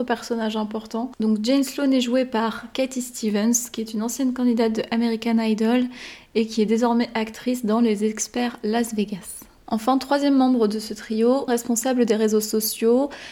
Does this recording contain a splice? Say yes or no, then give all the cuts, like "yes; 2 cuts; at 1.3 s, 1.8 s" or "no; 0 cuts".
yes; 1 cut; at 11.5 s